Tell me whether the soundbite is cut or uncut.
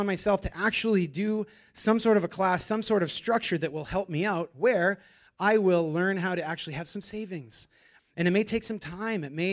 cut